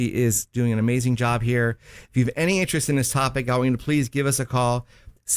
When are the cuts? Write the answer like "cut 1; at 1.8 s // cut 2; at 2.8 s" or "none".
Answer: none